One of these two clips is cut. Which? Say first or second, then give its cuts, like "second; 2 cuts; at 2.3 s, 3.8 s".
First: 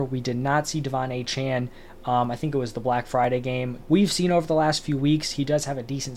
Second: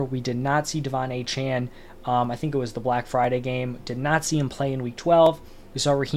first; 1 cut; at 3.8 s